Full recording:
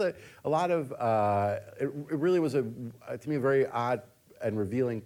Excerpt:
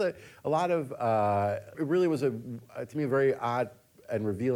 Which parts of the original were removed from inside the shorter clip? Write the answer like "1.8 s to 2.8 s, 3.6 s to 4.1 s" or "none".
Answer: 1.7 s to 2.1 s